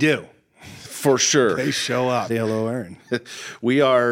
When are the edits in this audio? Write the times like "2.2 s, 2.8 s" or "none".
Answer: 2.3 s